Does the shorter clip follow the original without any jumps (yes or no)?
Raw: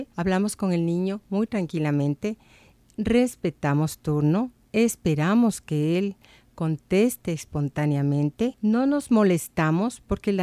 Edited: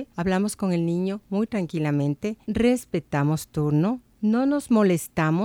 no